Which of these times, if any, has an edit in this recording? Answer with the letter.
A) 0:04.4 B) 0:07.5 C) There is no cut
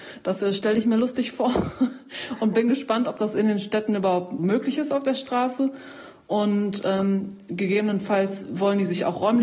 A